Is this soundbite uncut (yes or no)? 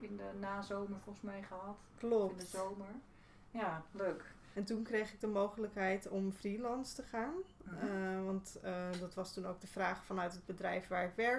no